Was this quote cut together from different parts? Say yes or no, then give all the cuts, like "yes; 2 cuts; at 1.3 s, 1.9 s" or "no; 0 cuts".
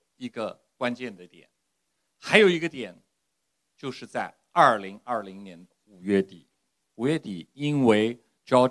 no; 0 cuts